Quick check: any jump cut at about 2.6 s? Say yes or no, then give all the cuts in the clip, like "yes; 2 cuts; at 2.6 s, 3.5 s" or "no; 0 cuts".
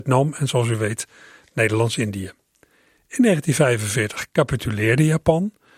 no; 0 cuts